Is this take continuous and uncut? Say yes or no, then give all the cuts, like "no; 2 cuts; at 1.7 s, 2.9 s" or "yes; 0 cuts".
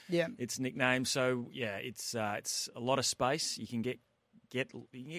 yes; 0 cuts